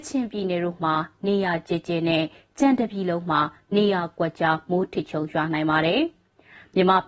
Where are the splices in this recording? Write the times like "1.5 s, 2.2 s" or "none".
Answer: none